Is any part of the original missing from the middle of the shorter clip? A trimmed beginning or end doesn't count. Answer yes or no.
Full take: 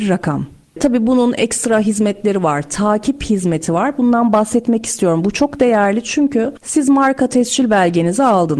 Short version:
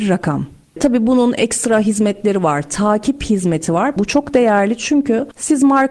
yes